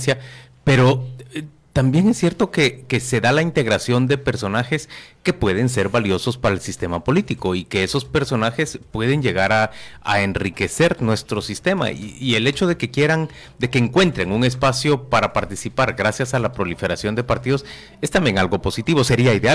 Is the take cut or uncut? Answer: uncut